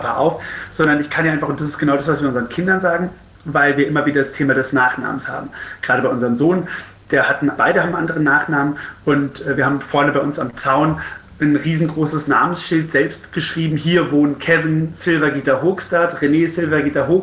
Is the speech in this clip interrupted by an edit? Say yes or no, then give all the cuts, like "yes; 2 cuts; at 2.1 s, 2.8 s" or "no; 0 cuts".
yes; 1 cut; at 7.6 s